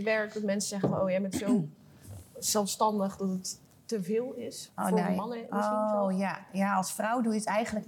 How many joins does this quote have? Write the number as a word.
zero